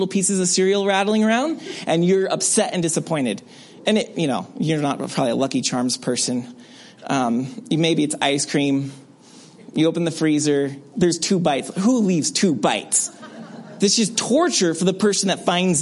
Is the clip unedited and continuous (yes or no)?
no